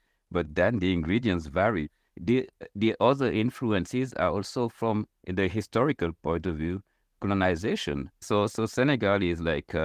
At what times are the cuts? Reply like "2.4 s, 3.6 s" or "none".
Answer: 2.1 s, 8.2 s

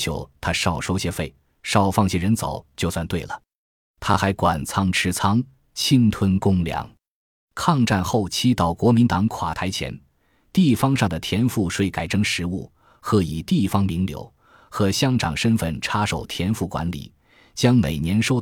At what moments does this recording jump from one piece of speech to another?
none

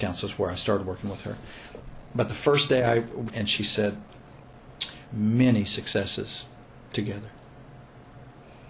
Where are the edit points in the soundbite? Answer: 3.3 s, 5.1 s

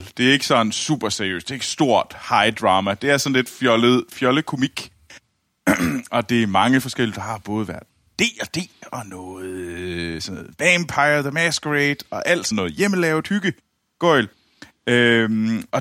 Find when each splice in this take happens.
12.5 s

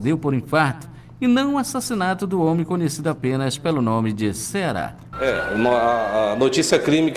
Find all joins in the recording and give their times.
5.1 s

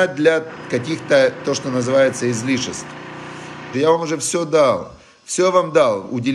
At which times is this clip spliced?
3.7 s

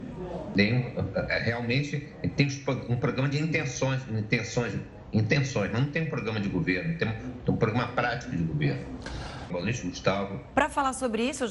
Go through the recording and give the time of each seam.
9.5 s, 10.5 s

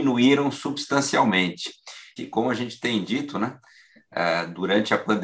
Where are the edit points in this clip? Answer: 2.2 s

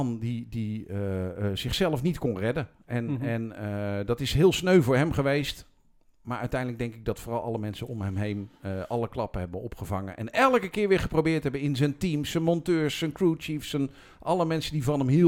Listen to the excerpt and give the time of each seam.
none

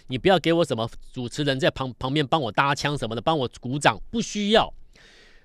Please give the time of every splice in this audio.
none

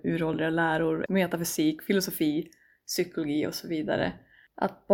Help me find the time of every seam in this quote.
1.1 s

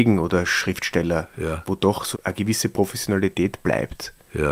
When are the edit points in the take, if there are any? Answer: 2.1 s

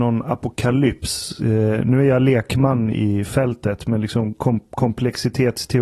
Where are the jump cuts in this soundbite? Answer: none

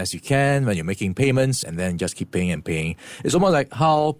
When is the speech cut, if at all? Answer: 1.6 s

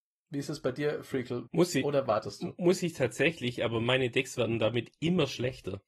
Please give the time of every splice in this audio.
1.5 s

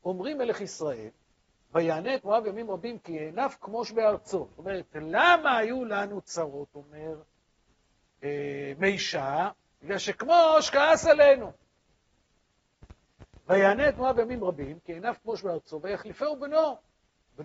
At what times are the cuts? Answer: none

